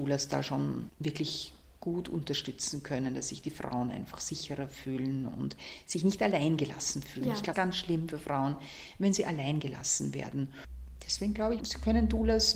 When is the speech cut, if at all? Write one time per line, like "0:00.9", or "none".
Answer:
0:07.5
0:11.6